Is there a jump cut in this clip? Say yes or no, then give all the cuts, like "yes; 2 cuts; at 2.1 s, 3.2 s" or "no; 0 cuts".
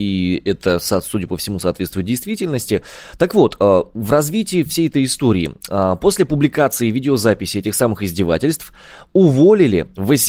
no; 0 cuts